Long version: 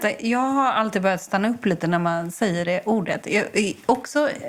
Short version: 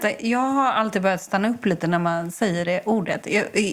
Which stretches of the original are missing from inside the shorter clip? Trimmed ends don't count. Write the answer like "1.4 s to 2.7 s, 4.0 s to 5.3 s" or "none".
none